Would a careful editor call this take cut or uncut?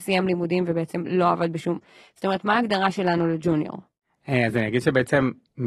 uncut